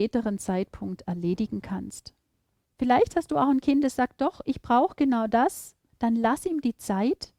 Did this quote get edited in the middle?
yes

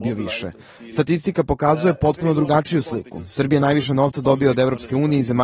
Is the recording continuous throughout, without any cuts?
yes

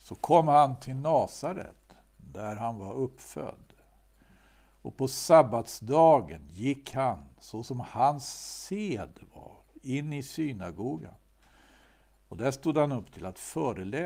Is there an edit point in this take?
no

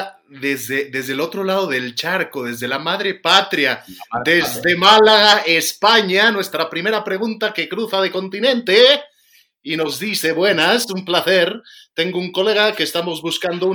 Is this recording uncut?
yes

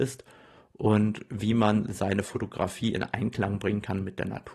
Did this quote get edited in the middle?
no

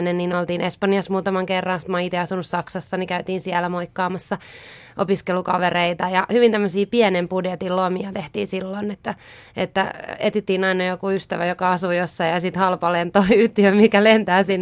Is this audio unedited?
yes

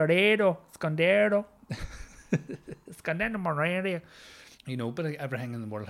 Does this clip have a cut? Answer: yes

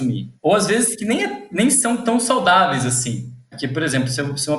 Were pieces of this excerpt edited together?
no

